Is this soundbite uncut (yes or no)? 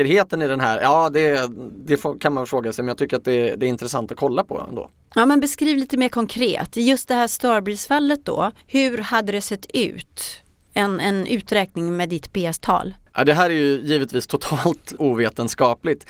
no